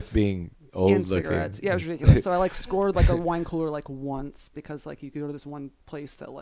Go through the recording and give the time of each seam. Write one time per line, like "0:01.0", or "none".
none